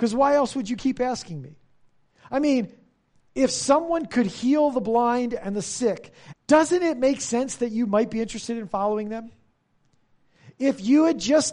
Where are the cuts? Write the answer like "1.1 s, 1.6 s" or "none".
6.3 s